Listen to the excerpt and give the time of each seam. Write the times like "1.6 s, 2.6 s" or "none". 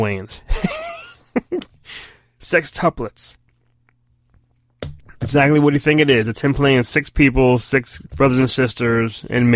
8.1 s